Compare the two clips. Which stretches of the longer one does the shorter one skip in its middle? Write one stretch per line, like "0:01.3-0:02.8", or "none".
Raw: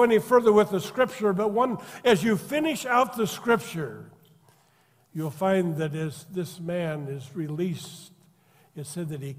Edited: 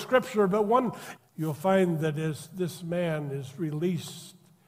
0:02.0-0:04.9